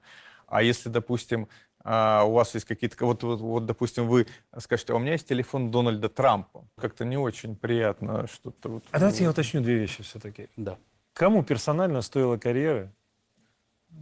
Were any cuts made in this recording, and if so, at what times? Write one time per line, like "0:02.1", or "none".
0:06.8